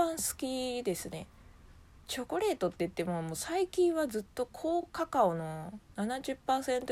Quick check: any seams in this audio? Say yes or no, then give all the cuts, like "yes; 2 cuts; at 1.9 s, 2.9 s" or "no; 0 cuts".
no; 0 cuts